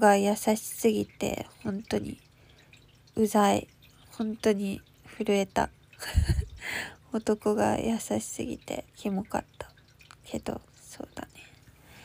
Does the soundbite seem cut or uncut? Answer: cut